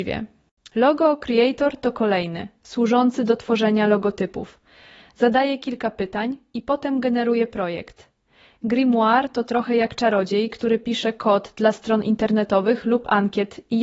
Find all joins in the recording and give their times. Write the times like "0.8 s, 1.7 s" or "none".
none

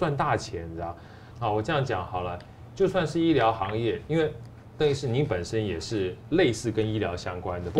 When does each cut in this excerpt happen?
1.3 s

